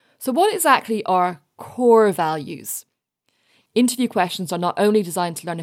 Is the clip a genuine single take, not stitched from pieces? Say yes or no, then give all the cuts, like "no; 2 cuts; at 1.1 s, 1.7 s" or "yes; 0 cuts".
no; 1 cut; at 3.6 s